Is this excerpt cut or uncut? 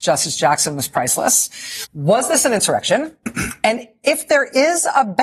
cut